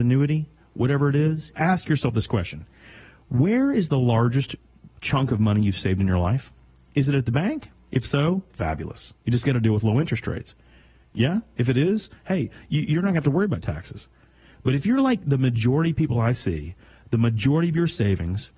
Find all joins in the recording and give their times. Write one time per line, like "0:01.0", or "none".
0:01.5
0:11.0